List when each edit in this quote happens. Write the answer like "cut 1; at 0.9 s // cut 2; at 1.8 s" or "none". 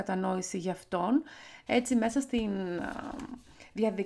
cut 1; at 1.7 s